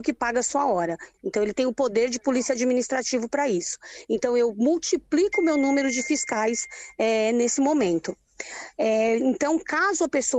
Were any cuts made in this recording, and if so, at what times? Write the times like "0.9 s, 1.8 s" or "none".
1.1 s